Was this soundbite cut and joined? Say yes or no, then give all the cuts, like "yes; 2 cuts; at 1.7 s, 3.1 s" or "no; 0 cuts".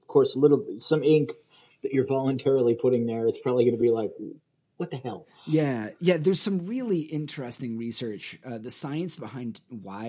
no; 0 cuts